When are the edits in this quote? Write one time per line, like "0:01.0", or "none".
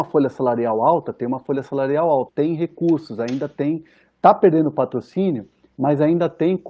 0:02.3